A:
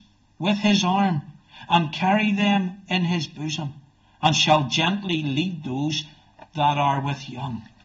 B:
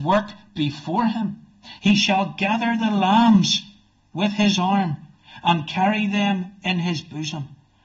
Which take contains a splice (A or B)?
B